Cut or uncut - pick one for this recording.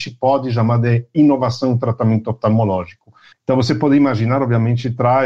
cut